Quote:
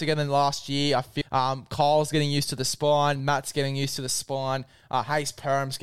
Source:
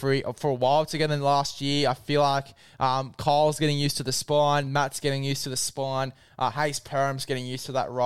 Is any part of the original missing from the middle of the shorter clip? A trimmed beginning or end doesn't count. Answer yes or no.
yes